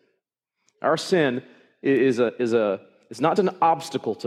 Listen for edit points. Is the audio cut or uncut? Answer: cut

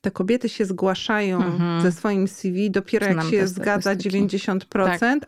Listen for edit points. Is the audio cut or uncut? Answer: uncut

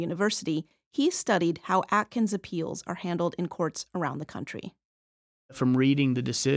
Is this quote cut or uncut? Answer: uncut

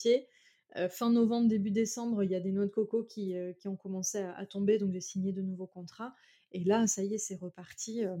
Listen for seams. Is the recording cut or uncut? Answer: uncut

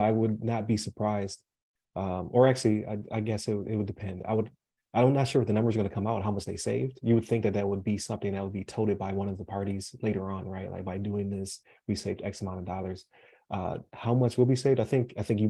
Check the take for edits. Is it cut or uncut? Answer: uncut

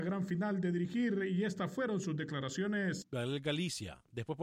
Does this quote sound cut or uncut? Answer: cut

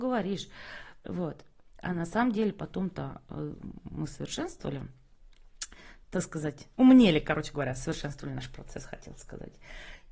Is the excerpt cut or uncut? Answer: uncut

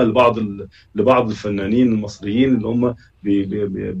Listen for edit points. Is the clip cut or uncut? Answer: uncut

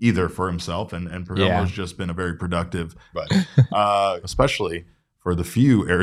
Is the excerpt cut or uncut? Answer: cut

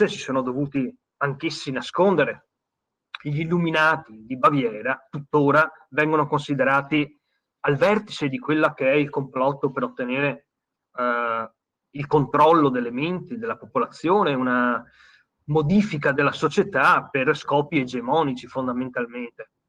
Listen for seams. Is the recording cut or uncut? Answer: cut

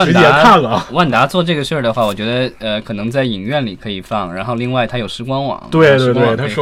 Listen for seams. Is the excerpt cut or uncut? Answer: uncut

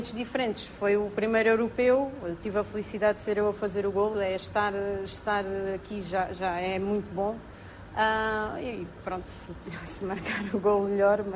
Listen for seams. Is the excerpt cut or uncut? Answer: cut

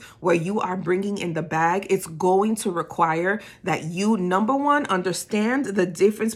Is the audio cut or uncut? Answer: uncut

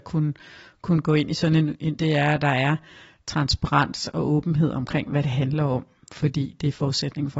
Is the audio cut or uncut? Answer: cut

